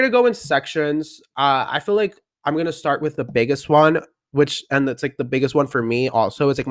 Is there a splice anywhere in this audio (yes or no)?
no